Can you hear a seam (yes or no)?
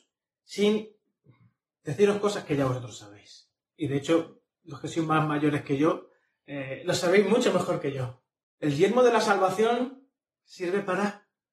yes